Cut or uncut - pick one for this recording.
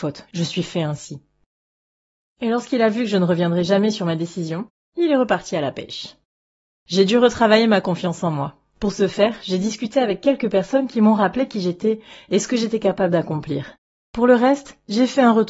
uncut